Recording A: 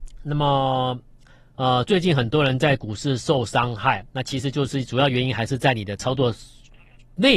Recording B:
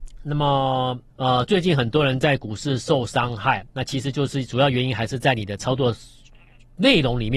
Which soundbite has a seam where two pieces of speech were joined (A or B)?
B